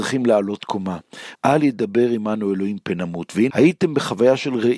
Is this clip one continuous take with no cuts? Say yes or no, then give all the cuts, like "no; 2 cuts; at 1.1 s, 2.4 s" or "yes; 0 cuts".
no; 2 cuts; at 1.3 s, 3.5 s